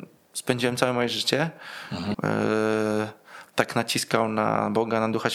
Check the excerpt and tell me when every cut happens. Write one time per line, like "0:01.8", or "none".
0:02.1